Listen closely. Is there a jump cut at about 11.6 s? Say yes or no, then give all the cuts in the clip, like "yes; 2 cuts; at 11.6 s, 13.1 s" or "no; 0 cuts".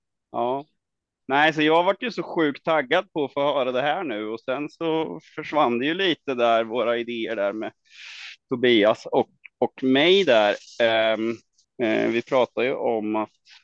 yes; 1 cut; at 11.6 s